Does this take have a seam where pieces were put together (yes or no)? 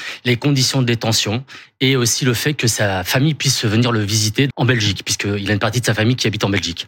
yes